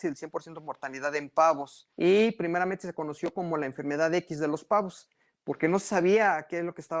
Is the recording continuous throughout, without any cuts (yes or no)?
no